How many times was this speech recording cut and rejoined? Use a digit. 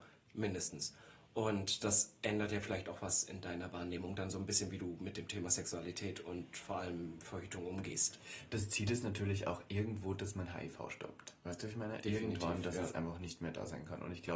0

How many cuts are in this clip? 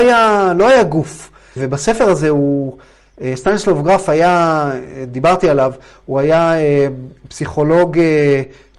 1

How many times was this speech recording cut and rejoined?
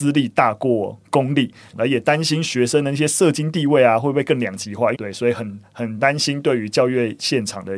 2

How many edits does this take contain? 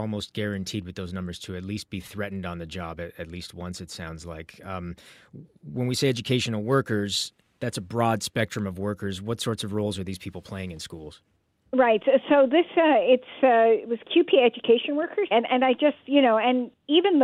1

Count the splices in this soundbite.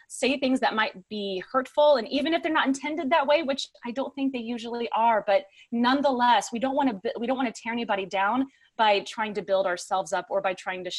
0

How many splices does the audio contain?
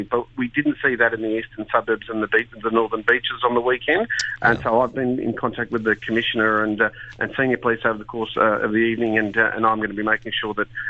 1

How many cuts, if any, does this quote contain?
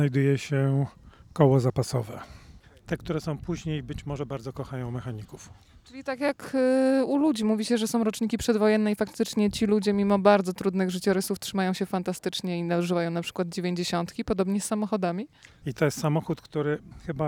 2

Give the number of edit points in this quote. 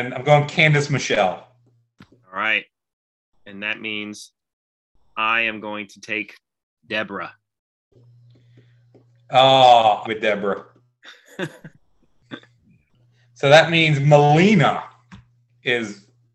3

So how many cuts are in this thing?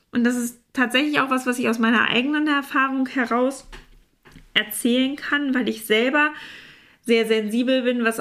0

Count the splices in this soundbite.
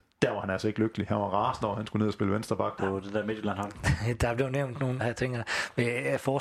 2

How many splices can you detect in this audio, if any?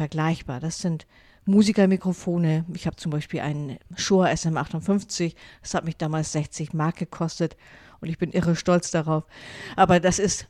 0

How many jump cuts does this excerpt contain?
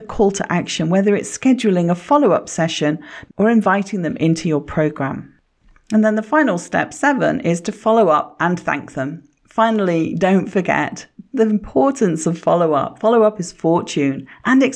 1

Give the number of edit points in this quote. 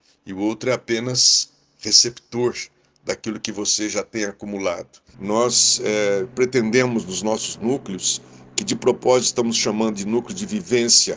1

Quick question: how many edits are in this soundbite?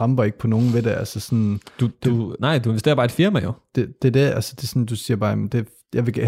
0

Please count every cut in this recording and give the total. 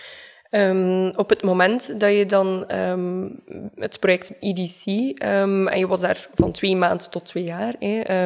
0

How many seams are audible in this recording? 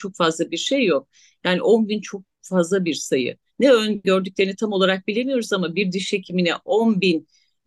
1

